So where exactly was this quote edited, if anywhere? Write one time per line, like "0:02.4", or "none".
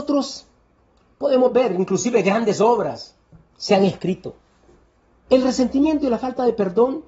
0:05.3